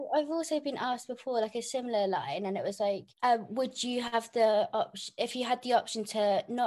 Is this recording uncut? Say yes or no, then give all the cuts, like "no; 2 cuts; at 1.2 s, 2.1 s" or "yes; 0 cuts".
no; 1 cut; at 3.1 s